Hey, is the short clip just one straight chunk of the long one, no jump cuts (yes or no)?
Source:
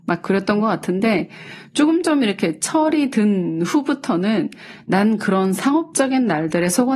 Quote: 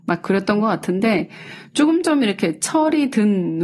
yes